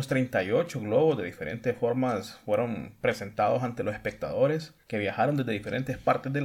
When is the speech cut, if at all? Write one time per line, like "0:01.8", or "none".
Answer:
none